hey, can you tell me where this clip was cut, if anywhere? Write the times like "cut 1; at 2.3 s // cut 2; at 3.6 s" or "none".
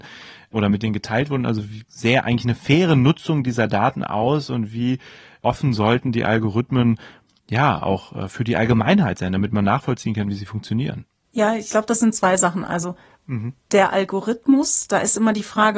cut 1; at 1.9 s